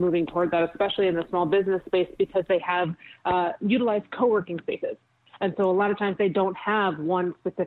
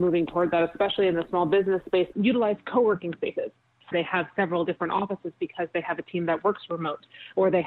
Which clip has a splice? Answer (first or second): second